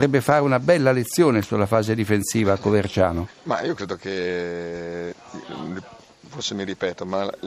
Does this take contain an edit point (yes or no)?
no